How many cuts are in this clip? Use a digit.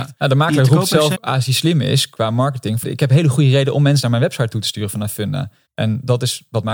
3